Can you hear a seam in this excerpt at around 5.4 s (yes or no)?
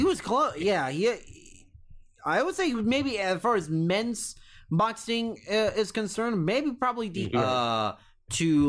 no